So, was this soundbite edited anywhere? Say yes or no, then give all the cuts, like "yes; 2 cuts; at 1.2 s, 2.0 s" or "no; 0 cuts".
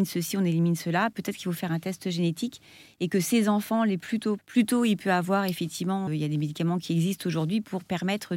yes; 2 cuts; at 4.4 s, 6.1 s